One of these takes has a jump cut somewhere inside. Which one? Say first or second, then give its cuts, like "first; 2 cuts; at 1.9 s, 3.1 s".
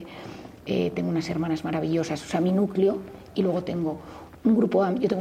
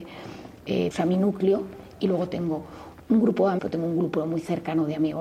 second; 2 cuts; at 0.9 s, 3.6 s